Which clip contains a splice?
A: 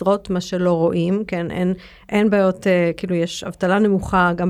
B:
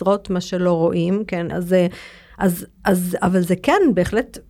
B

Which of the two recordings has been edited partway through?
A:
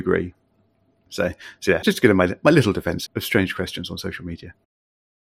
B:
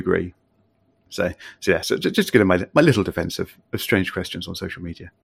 A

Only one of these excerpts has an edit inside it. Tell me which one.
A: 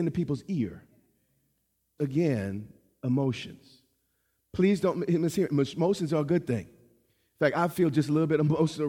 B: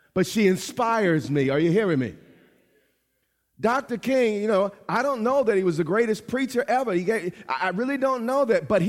A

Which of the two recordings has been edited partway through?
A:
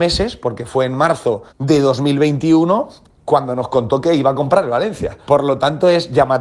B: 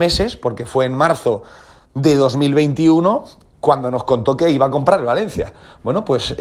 A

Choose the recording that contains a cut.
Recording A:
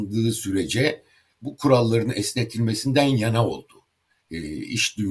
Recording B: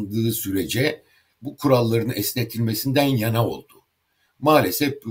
A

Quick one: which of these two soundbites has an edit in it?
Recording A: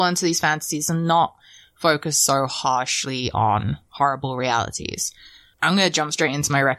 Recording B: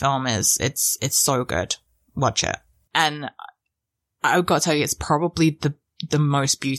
B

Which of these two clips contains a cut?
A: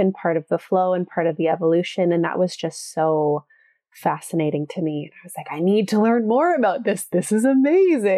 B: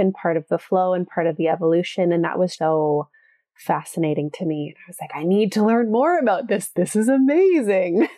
B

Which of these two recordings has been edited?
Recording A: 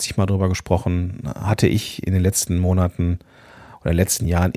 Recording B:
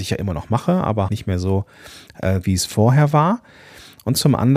B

